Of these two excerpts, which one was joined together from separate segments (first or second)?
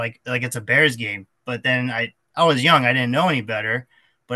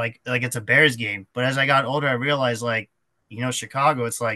second